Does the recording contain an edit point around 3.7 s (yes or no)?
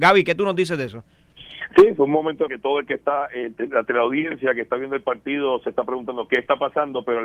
no